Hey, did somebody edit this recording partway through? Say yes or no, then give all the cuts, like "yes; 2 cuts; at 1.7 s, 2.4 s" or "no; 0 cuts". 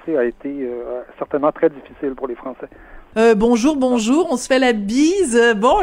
yes; 1 cut; at 3.1 s